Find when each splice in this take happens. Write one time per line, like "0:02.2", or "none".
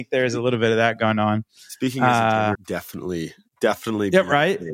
0:02.5